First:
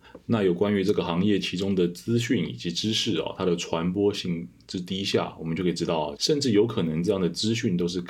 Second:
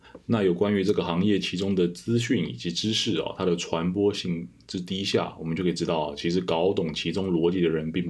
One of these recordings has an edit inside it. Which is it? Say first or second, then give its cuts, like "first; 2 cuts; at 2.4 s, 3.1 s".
first; 1 cut; at 6.2 s